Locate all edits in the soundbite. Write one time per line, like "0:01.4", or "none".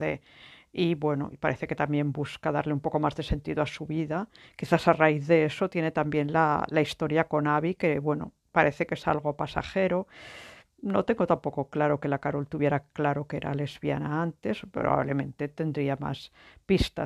none